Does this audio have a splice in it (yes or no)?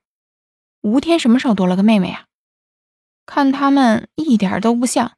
no